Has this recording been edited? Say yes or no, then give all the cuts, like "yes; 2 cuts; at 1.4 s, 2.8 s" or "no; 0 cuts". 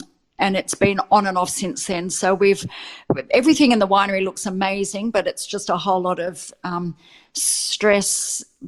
no; 0 cuts